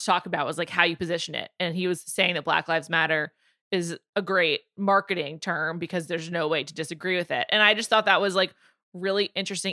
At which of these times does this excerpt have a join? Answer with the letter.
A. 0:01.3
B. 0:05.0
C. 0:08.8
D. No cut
D